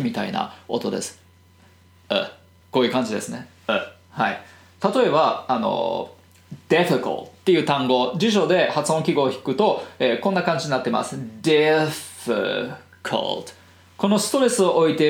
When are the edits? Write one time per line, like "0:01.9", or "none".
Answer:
0:02.6